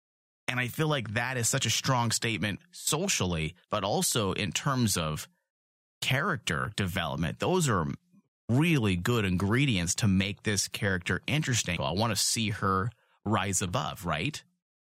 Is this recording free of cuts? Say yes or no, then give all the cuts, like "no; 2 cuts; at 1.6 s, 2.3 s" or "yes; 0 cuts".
no; 1 cut; at 11.8 s